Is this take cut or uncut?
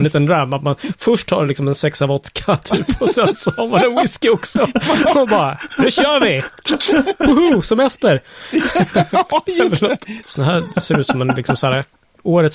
cut